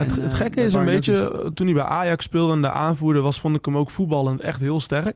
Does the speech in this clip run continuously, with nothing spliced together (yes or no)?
yes